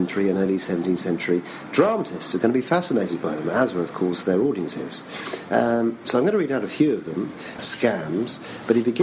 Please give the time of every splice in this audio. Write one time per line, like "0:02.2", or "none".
0:07.6